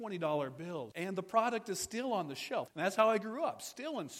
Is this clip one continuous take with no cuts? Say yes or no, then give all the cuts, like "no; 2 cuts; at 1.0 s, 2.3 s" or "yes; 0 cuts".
no; 2 cuts; at 0.9 s, 2.7 s